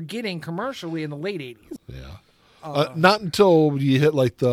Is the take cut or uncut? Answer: cut